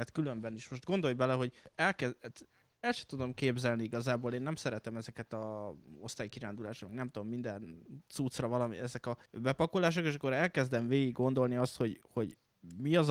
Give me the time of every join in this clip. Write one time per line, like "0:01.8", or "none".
none